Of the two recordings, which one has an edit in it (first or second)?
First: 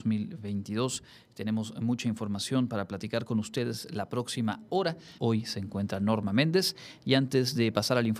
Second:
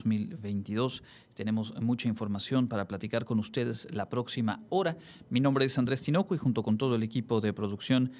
first